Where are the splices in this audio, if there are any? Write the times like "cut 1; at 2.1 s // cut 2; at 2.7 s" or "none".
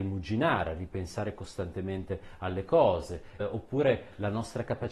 cut 1; at 3.4 s